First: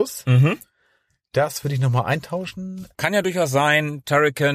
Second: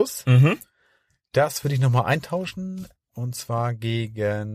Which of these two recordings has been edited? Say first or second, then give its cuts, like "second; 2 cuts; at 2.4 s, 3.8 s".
first; 1 cut; at 2.9 s